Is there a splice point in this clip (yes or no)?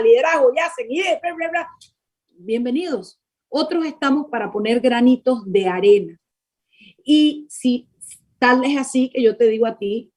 no